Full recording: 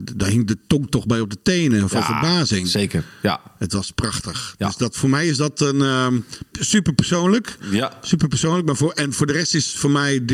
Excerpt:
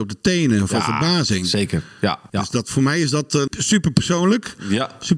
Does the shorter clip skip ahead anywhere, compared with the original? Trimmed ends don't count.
yes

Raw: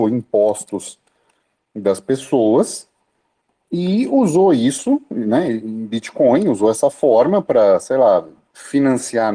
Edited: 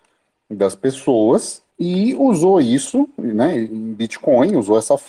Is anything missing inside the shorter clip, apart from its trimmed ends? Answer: yes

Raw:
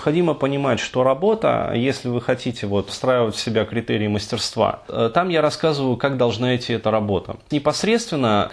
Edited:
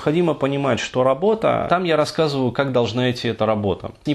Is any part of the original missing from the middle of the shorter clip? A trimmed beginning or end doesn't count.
yes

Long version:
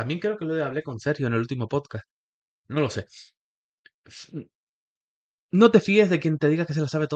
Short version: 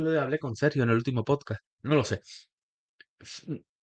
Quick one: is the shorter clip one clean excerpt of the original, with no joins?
no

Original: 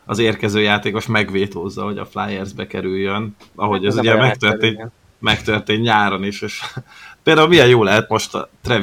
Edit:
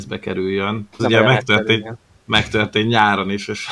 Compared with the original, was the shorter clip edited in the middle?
yes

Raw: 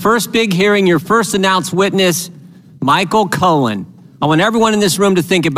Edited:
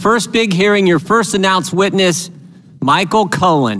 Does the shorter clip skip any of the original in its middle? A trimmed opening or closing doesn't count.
no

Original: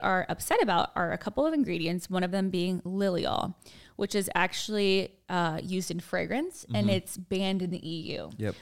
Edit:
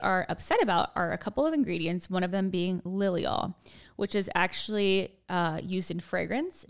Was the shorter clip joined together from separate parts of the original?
no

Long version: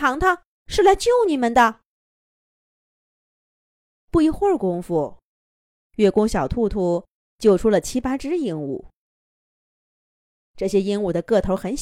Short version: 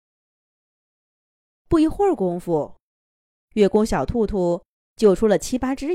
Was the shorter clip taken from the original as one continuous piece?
yes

